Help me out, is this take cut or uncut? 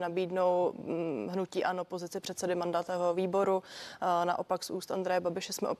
uncut